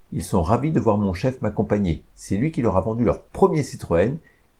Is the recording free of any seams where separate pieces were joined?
yes; 0 cuts

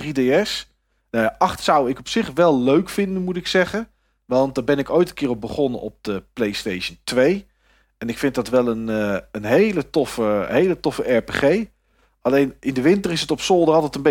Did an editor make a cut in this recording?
no; 0 cuts

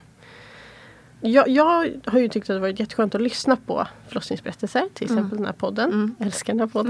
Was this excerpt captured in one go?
yes; 0 cuts

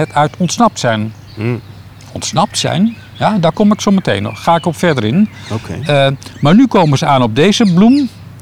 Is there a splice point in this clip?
no; 0 cuts

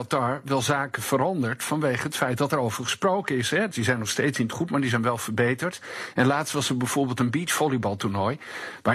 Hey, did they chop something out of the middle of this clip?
yes; 1 cut; at 3.7 s

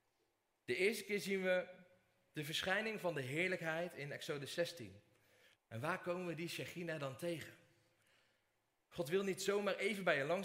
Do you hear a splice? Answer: yes; 2 cuts; at 5.5 s, 8.8 s

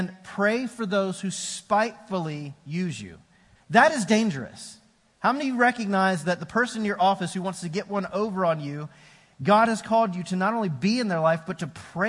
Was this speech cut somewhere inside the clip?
yes; 1 cut; at 3.5 s

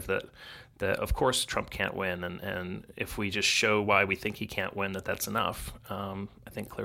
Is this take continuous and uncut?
yes; 0 cuts

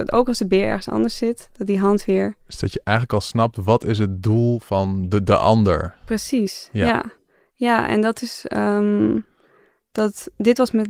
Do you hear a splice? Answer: no; 0 cuts

